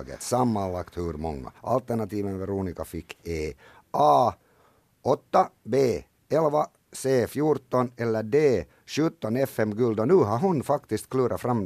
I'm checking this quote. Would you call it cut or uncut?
cut